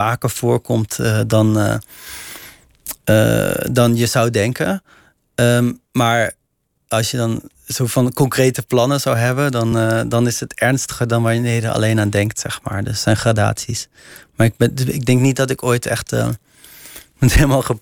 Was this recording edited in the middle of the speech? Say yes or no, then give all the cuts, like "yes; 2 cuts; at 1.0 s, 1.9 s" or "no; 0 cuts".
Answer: no; 0 cuts